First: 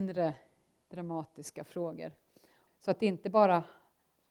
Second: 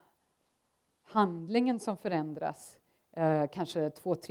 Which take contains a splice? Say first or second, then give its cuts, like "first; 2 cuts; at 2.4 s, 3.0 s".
first; 1 cut; at 2.7 s